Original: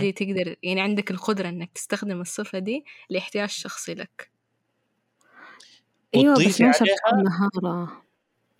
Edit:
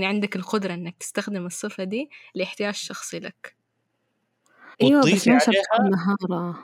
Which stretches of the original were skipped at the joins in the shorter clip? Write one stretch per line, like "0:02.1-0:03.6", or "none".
0:05.5-0:06.1

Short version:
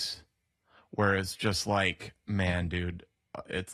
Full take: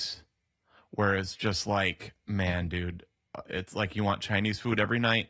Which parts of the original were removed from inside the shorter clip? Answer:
none

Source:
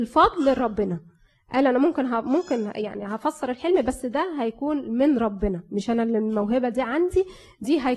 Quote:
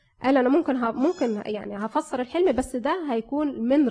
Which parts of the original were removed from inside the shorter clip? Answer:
none

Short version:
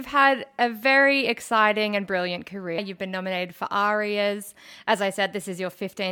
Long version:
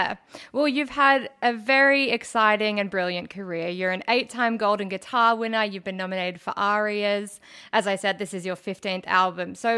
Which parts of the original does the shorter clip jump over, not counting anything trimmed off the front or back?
0:03.6-0:05.6

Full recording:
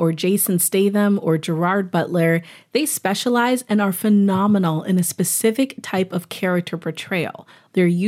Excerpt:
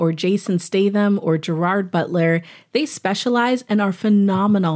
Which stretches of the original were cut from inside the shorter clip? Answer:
none

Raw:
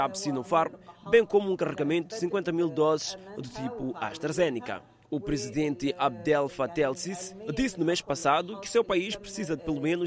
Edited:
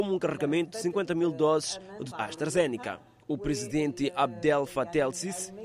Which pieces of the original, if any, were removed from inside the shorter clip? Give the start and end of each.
0:03.5-0:03.9

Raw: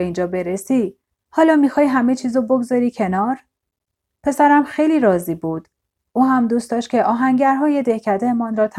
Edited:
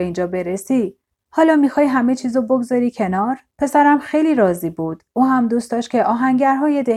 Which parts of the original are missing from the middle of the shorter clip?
0:03.5-0:04.1
0:05.7-0:06.1

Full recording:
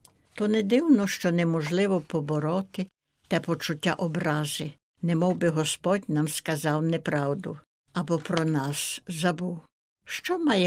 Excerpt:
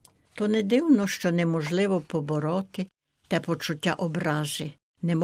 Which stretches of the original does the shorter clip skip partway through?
none

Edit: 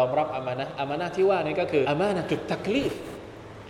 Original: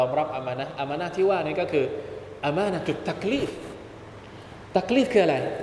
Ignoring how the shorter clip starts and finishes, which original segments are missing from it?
0:01.8-0:02.4

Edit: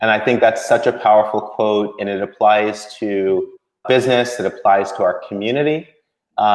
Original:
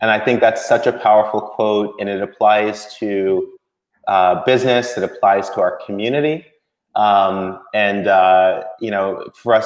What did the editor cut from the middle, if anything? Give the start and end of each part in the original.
0:03.8-0:04.4

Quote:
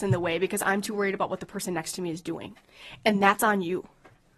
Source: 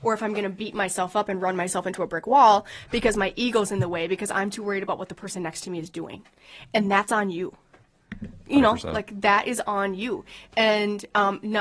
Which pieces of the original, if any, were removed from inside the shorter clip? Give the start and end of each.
none

